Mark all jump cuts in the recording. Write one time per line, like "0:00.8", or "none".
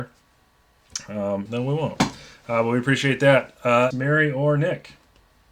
0:01.5
0:03.9